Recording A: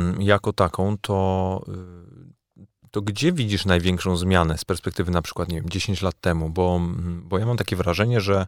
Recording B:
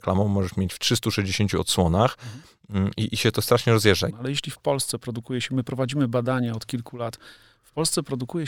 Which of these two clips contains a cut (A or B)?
B